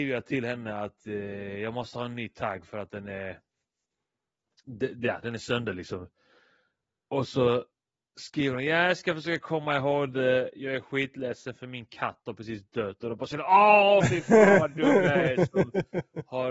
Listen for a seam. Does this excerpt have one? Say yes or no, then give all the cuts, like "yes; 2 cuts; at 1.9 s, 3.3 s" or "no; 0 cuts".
no; 0 cuts